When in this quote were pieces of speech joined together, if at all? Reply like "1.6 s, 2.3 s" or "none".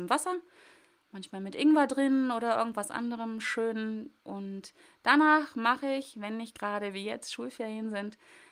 none